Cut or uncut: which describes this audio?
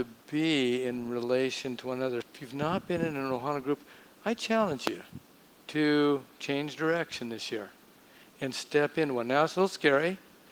cut